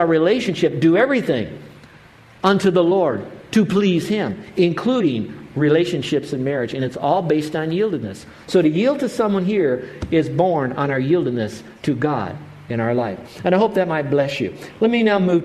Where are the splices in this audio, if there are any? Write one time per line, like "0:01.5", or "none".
none